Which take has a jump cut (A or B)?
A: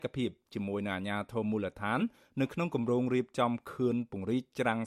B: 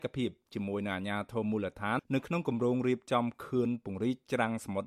B